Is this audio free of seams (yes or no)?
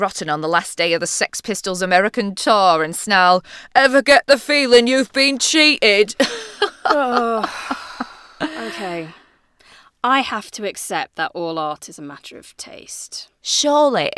yes